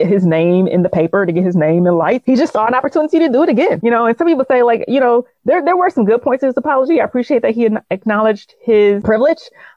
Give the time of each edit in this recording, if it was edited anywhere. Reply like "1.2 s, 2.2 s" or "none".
none

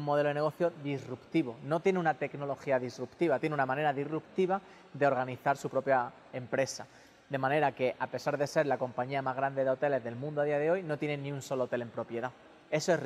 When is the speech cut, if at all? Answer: 3.4 s

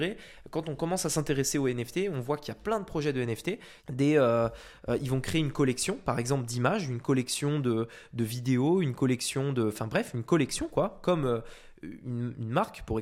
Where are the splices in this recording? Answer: 3.8 s

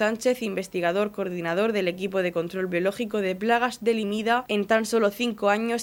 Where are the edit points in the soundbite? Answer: none

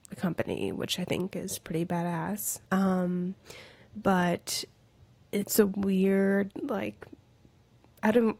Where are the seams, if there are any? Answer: 2.6 s

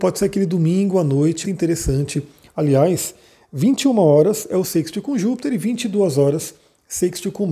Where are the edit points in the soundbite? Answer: 1.4 s

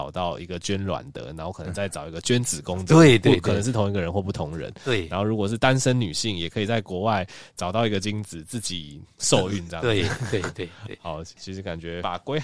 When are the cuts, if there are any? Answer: none

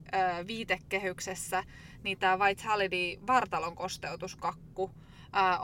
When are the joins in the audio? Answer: none

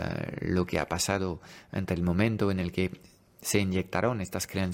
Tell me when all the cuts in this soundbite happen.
none

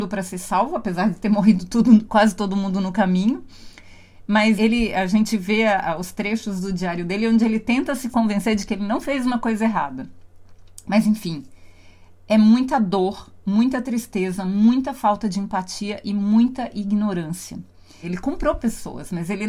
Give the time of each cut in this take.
4.6 s, 18.0 s

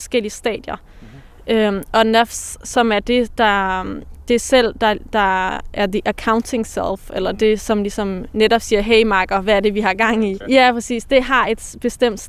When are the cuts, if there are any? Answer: 10.4 s

